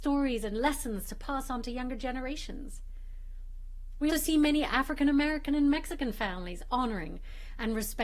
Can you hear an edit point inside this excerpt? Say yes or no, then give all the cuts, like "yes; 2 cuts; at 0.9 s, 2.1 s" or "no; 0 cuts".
yes; 1 cut; at 4.1 s